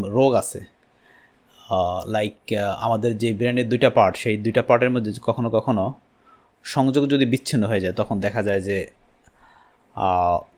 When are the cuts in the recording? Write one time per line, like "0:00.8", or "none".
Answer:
none

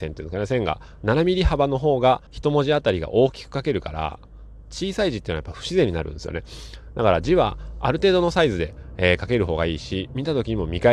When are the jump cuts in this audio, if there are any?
0:02.3

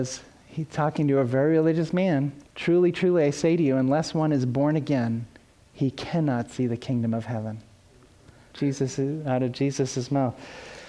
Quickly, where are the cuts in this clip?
0:02.5
0:08.5

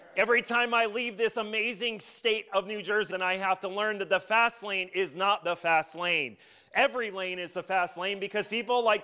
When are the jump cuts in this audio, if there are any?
0:03.1

